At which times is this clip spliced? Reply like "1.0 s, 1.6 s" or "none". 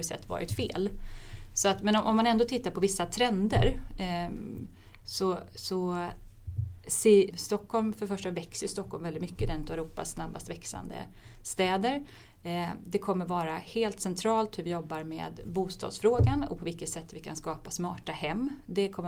7.3 s